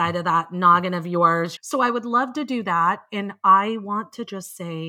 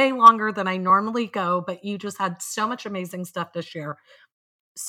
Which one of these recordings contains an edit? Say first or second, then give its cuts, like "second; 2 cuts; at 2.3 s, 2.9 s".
first; 1 cut; at 1.6 s